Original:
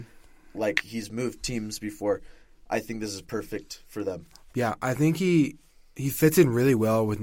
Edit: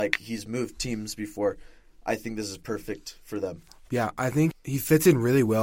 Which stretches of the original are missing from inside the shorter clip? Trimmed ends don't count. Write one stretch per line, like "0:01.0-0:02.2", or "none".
0:05.2-0:05.8